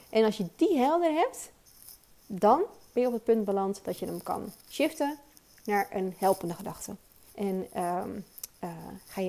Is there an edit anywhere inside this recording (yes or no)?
yes